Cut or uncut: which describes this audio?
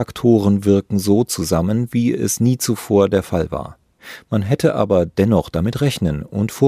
uncut